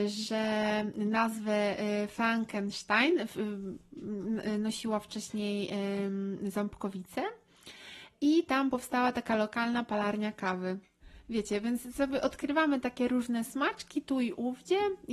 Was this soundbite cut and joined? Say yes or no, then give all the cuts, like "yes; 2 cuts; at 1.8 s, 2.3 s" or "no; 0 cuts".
no; 0 cuts